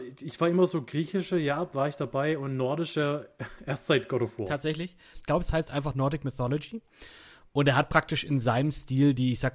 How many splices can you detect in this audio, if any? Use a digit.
1